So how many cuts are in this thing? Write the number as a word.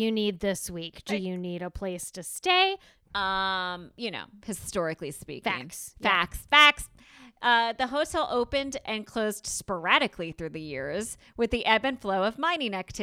one